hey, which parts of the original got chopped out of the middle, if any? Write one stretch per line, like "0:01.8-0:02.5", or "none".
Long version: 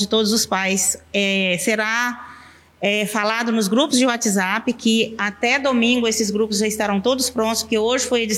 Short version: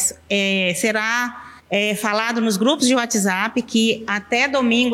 0:02.4-0:02.7